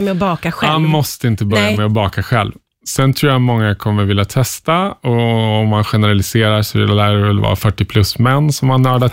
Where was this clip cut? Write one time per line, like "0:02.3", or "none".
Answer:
none